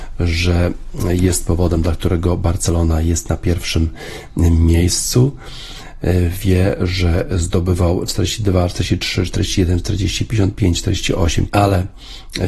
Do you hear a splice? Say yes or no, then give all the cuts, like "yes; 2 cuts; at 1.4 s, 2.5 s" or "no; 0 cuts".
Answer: yes; 2 cuts; at 8.1 s, 11.5 s